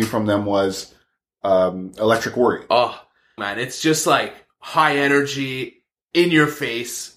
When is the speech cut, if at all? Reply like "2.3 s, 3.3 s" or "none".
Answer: 3.4 s